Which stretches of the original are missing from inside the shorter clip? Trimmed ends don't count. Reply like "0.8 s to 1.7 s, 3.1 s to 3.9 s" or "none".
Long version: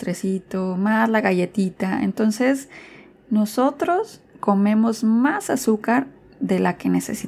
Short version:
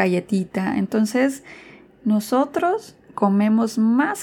none